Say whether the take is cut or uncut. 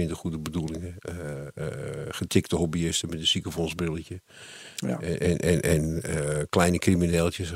uncut